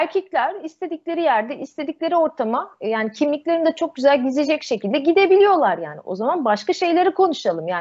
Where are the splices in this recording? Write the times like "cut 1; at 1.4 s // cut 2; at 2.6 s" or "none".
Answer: none